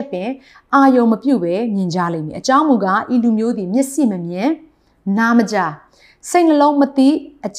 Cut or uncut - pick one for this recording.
uncut